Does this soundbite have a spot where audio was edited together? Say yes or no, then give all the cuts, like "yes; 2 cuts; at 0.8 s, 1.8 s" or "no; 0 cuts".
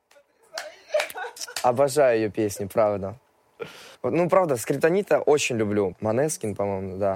yes; 2 cuts; at 3.9 s, 5.9 s